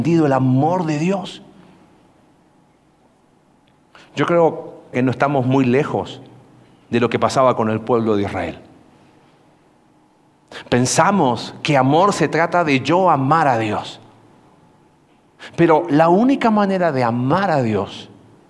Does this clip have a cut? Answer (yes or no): yes